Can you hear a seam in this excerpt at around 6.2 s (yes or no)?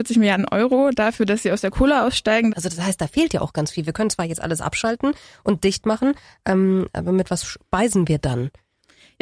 no